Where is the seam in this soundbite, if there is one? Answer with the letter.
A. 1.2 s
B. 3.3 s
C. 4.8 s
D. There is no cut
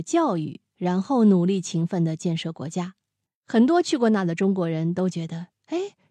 B